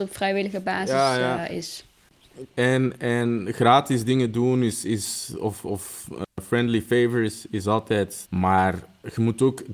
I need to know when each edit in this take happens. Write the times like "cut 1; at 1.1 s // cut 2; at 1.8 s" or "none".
cut 1; at 2.5 s // cut 2; at 8.3 s